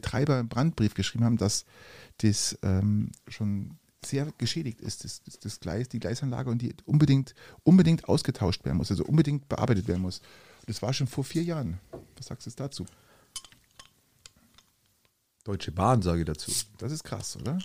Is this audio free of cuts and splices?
yes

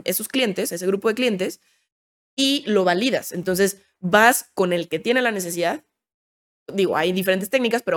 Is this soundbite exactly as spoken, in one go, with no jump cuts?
yes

